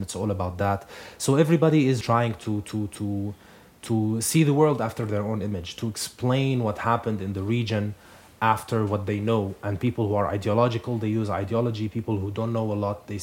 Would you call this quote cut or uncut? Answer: cut